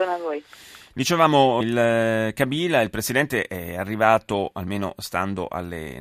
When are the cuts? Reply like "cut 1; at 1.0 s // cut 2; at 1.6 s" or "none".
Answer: cut 1; at 1.6 s